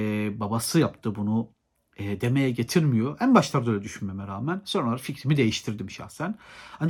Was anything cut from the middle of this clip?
no; 0 cuts

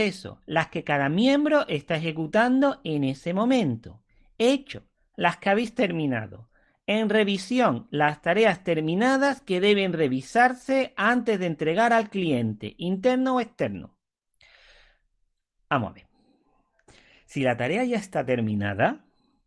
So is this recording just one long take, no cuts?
yes; 0 cuts

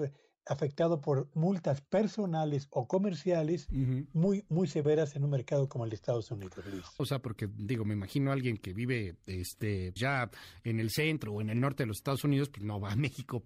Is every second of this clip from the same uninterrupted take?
no; 2 cuts; at 7.0 s, 10.0 s

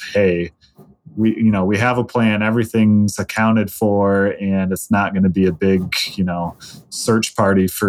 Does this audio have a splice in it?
no; 0 cuts

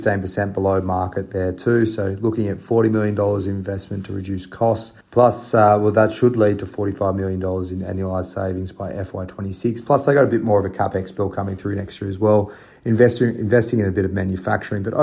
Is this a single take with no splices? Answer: no; 1 cut; at 5.0 s

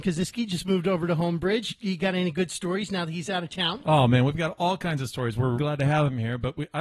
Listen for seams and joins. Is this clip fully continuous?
no; 1 cut; at 5.6 s

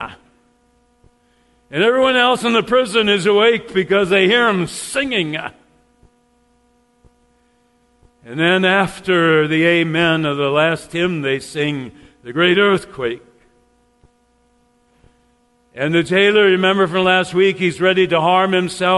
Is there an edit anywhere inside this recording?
no; 0 cuts

